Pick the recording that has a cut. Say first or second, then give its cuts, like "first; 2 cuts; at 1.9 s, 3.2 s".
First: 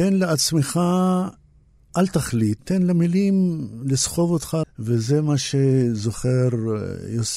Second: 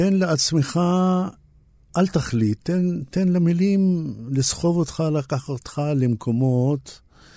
first; 2 cuts; at 2.6 s, 4.6 s